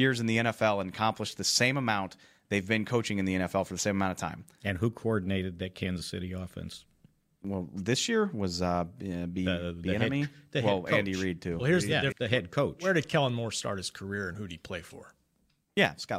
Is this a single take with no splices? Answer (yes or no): no